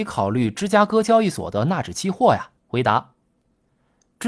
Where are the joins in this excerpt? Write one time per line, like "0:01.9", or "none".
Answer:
0:02.6